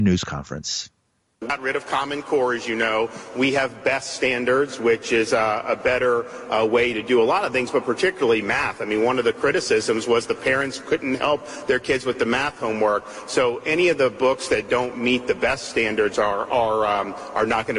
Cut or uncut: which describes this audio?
uncut